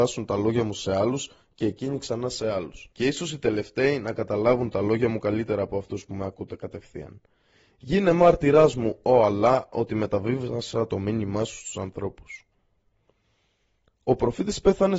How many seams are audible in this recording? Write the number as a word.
one